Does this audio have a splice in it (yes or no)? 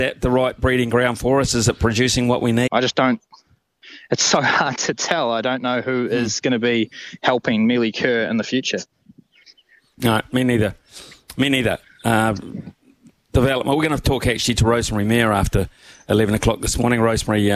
yes